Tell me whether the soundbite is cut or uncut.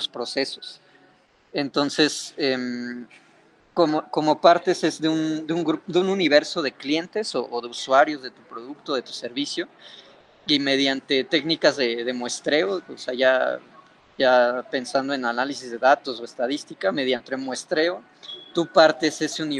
uncut